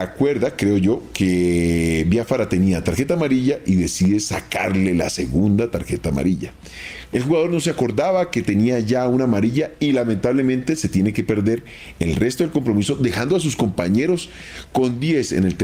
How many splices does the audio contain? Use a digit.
1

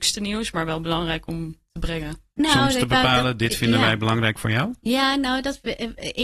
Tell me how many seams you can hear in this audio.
1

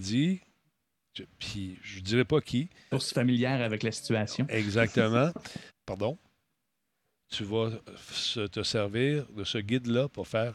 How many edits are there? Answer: 2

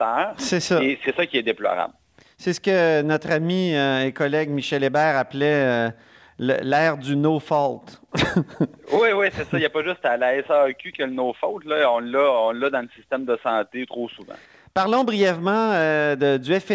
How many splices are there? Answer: 0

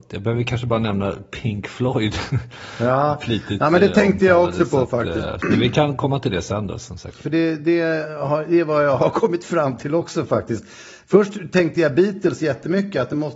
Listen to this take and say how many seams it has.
1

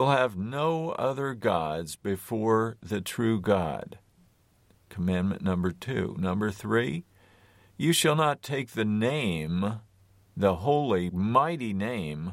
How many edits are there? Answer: 1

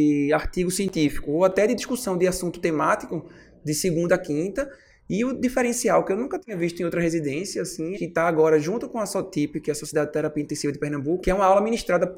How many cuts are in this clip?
2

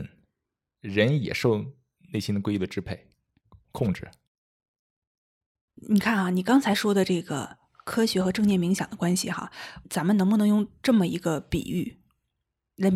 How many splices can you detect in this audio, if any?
1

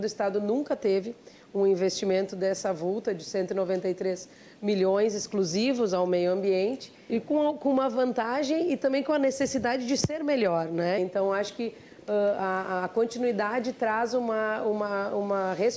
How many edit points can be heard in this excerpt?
2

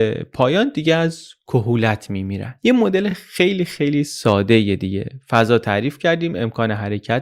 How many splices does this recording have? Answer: 0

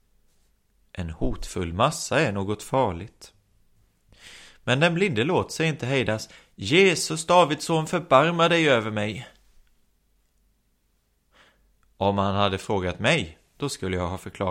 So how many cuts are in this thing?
0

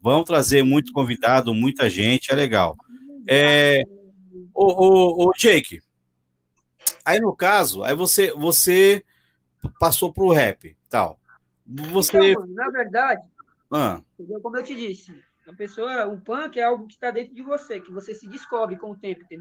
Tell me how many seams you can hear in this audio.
0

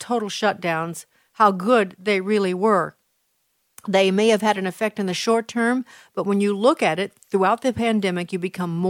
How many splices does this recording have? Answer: 0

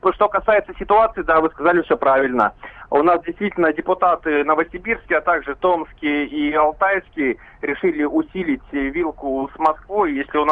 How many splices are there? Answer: 0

